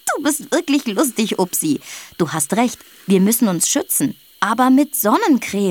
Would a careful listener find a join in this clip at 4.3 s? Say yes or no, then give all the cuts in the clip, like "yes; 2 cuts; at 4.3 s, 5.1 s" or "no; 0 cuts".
no; 0 cuts